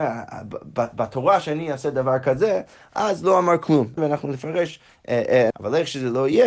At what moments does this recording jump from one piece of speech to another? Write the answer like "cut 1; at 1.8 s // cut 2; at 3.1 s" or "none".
cut 1; at 4.0 s // cut 2; at 5.5 s